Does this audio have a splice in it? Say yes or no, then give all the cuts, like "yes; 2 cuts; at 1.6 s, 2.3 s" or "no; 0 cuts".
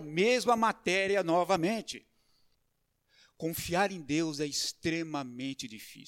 no; 0 cuts